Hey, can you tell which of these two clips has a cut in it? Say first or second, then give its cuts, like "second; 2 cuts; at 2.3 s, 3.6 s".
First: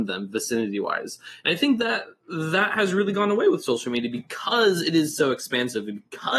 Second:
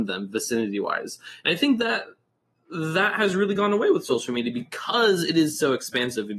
first; 1 cut; at 2.2 s